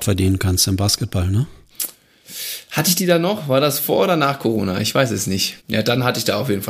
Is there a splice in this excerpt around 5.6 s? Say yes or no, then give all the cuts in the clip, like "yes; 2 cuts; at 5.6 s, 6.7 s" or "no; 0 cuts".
yes; 1 cut; at 5.6 s